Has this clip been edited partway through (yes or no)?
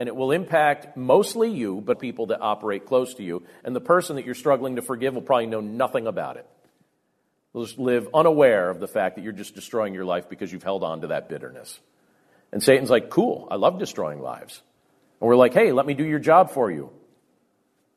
yes